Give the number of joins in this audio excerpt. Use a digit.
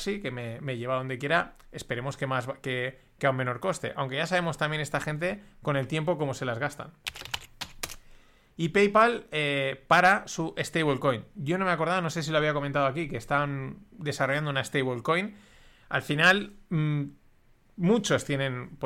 0